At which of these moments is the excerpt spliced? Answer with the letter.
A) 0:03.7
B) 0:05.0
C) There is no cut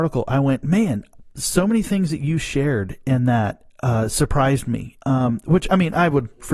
B